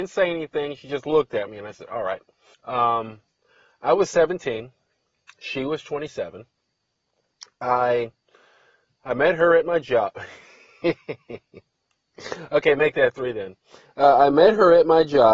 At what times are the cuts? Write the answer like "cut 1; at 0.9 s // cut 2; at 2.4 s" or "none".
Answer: cut 1; at 2.5 s